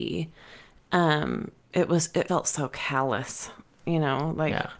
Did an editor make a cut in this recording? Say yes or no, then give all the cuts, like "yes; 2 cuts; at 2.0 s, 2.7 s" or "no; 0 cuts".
yes; 1 cut; at 2.3 s